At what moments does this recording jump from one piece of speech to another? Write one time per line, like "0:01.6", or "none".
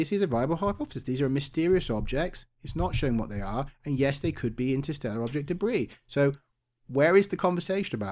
none